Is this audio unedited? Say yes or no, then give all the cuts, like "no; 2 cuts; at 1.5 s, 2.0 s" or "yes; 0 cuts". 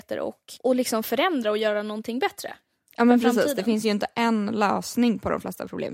yes; 0 cuts